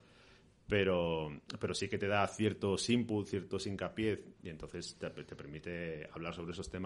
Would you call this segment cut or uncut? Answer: cut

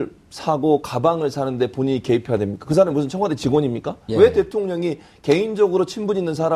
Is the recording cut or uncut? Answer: cut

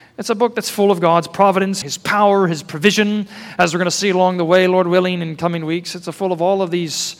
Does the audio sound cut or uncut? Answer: cut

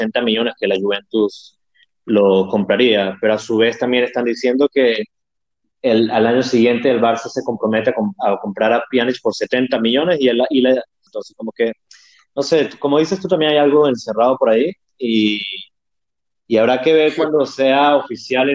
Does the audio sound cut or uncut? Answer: cut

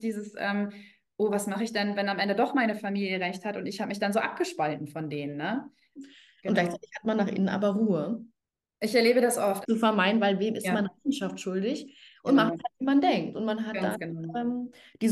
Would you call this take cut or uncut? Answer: cut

